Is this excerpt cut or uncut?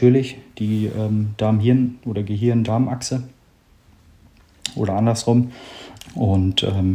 cut